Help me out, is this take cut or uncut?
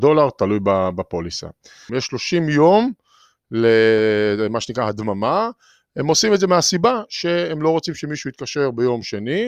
cut